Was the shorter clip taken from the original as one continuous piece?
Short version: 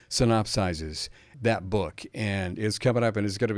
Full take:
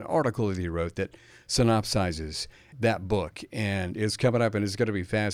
yes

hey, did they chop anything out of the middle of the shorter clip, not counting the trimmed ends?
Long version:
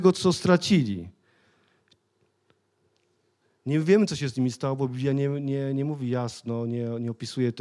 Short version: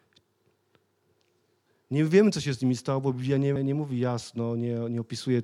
yes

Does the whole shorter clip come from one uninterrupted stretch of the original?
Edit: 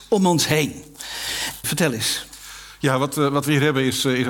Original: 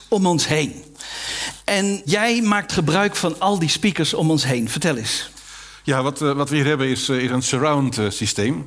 no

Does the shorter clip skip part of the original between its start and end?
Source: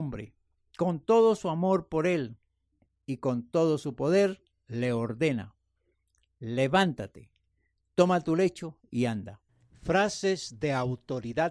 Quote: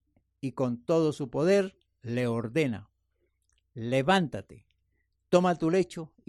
no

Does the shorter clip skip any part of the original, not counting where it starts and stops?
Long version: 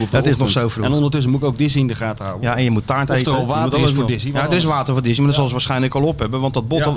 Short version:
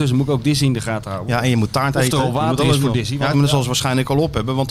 yes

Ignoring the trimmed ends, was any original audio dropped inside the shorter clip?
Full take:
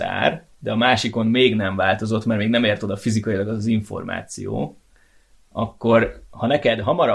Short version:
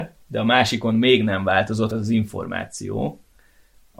yes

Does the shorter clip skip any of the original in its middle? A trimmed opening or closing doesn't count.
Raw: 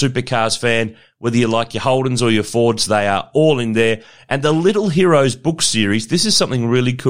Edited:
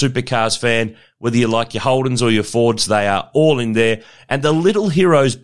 no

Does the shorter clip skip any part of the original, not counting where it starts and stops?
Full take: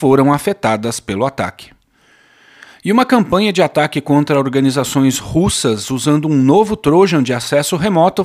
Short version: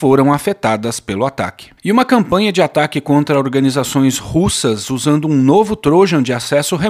yes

